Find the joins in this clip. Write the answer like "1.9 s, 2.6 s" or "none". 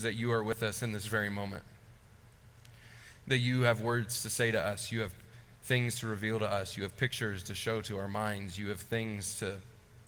none

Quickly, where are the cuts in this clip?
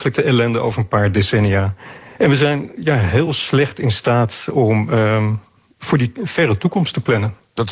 none

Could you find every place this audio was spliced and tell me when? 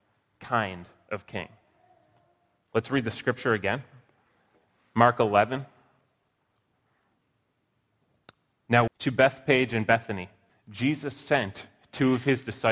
8.9 s, 10.5 s

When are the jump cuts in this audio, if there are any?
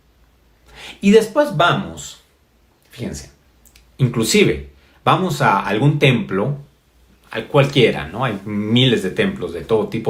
none

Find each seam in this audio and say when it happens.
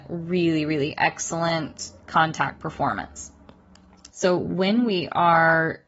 4.1 s

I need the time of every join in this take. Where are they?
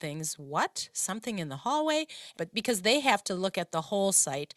2.3 s

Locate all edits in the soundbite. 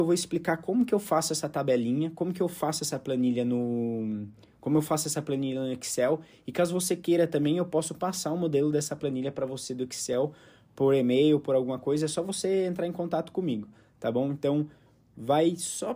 none

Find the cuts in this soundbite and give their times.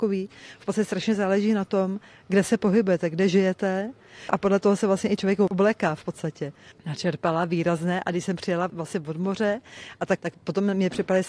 6.7 s, 10.2 s

